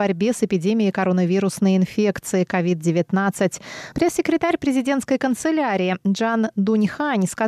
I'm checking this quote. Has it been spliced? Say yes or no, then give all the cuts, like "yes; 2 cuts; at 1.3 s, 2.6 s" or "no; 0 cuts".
yes; 1 cut; at 3.9 s